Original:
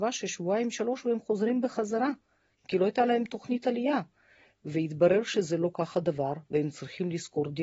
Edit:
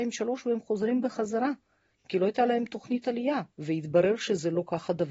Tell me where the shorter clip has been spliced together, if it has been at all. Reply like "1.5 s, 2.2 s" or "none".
3.5 s